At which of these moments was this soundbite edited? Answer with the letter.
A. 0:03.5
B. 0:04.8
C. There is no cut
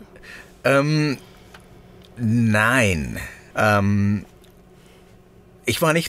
A